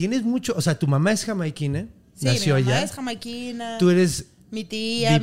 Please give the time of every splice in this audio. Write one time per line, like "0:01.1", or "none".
none